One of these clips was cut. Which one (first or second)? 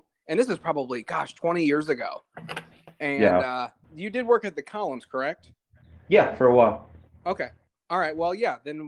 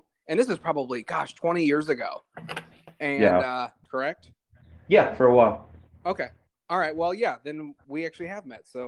second